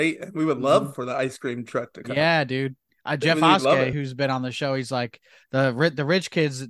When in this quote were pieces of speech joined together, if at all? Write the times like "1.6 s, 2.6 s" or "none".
none